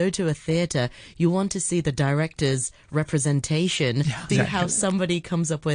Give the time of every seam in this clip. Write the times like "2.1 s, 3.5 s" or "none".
4.3 s